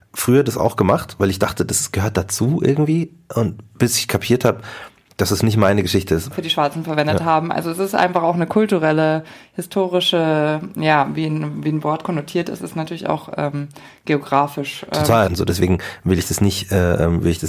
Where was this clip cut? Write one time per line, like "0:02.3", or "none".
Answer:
0:06.3
0:15.3